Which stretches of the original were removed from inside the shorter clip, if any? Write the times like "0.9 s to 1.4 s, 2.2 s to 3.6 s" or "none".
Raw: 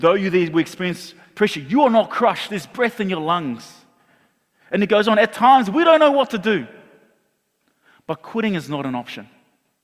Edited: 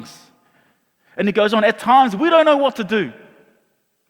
none